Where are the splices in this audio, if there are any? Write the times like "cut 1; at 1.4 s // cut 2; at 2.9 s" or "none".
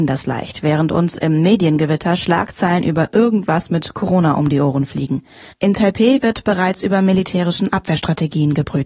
cut 1; at 5.5 s

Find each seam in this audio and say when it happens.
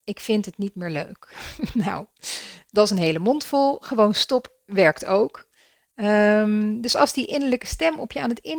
none

